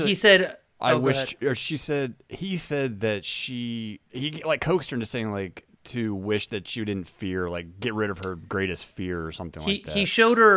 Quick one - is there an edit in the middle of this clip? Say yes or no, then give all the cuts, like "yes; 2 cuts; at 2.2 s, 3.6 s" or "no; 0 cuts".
no; 0 cuts